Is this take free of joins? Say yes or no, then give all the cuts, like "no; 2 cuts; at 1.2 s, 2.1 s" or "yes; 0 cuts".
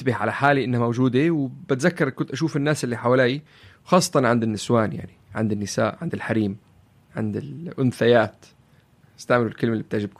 yes; 0 cuts